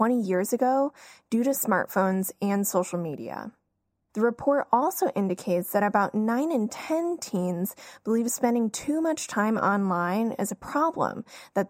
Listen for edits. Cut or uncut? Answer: cut